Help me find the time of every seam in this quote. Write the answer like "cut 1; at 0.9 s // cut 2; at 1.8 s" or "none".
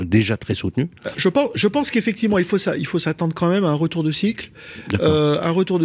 cut 1; at 1.1 s